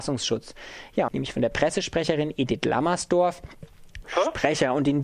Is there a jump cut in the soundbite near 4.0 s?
yes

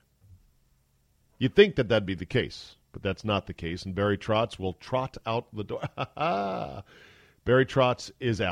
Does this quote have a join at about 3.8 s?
no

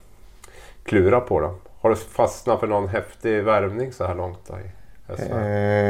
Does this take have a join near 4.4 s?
no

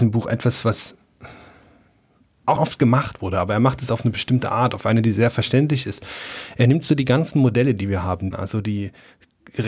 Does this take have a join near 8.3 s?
yes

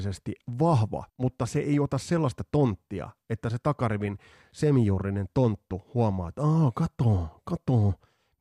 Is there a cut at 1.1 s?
yes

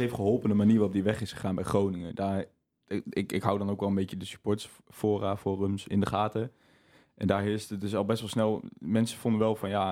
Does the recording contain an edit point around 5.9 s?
yes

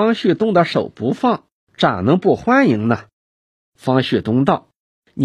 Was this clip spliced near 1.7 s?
yes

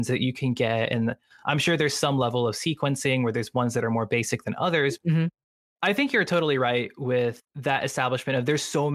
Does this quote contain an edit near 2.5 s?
no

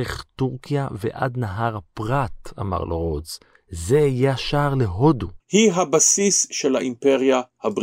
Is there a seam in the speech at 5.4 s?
yes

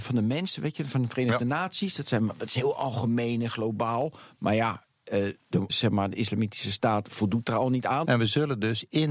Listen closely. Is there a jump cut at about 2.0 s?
no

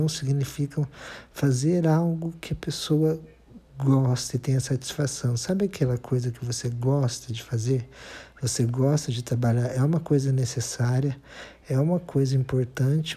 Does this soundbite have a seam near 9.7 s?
no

